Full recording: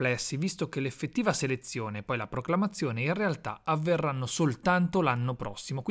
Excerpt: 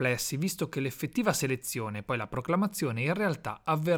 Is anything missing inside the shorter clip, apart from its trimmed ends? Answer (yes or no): no